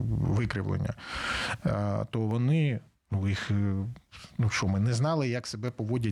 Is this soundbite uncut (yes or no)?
yes